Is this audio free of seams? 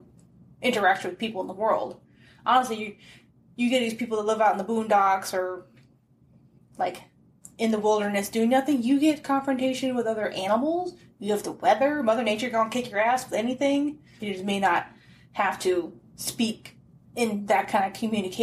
no; 2 cuts; at 14.2 s, 16.1 s

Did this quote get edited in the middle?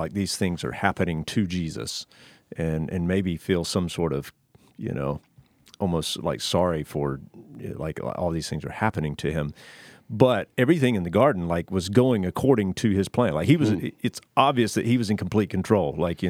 no; 0 cuts

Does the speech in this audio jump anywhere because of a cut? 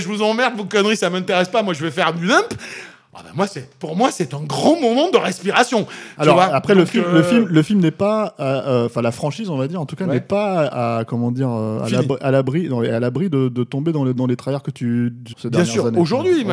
yes; 1 cut; at 15.3 s

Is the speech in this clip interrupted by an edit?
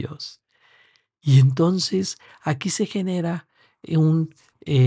no; 0 cuts

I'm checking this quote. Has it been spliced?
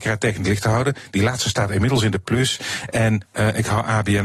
no; 0 cuts

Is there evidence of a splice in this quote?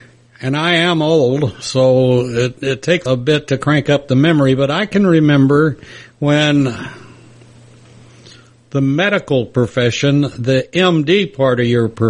yes; 1 cut; at 3.1 s

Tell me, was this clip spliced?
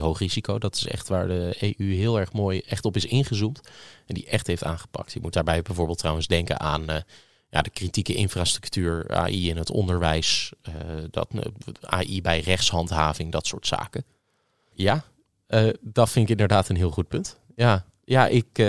yes; 1 cut; at 14.7 s

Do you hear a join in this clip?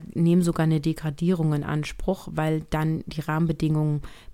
no; 0 cuts

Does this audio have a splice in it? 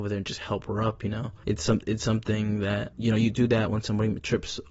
yes; 1 cut; at 2.9 s

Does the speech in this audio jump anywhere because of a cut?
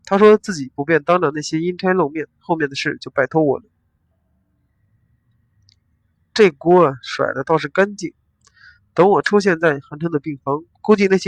no; 0 cuts

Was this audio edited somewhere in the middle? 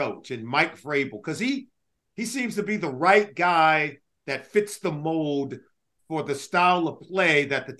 no; 0 cuts

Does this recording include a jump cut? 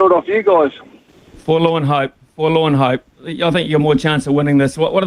no; 0 cuts

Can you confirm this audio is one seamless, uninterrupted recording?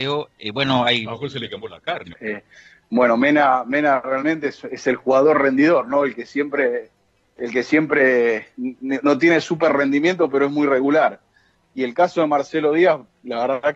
no; 1 cut; at 2.1 s

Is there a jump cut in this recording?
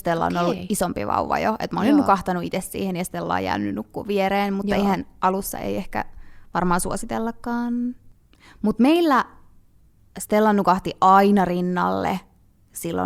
no; 0 cuts

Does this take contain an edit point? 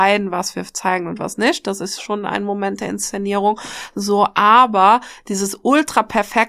no; 0 cuts

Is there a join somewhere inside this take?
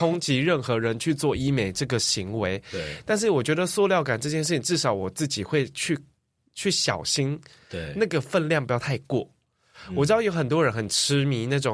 no; 0 cuts

